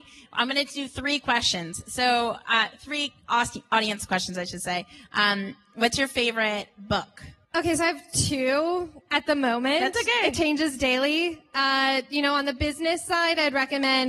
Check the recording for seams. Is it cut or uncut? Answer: uncut